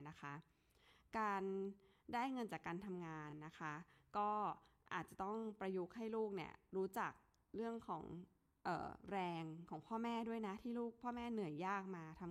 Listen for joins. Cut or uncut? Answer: uncut